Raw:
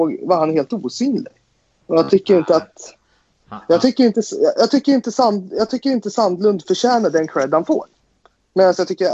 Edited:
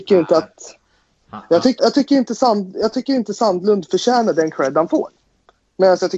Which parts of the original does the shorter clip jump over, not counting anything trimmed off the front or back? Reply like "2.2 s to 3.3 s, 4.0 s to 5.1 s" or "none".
4.0 s to 4.5 s